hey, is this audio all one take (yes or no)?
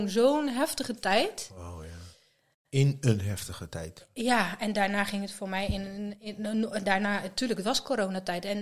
yes